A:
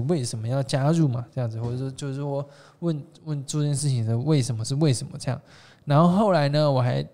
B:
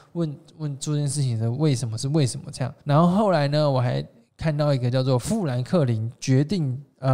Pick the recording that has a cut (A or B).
B